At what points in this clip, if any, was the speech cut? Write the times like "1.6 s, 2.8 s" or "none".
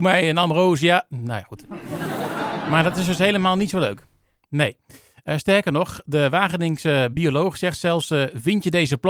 none